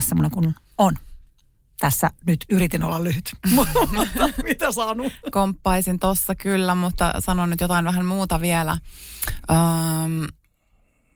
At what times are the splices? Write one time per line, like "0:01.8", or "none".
0:05.3